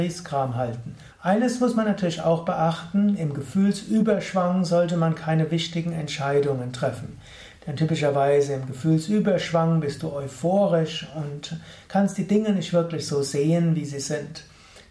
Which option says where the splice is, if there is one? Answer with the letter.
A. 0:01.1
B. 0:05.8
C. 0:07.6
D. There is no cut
A